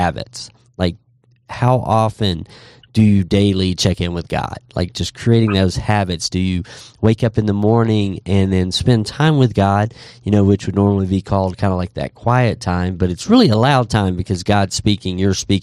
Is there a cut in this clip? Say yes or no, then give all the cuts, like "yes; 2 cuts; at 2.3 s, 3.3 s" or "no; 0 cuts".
no; 0 cuts